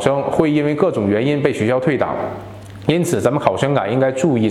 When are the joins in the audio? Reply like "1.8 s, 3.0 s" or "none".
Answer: none